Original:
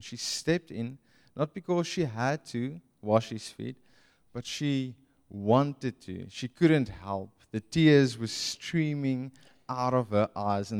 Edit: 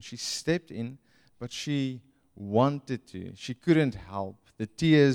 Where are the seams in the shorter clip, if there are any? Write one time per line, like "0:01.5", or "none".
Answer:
0:01.3